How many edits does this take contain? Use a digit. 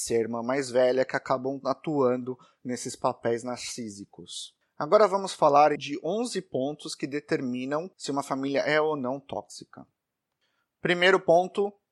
2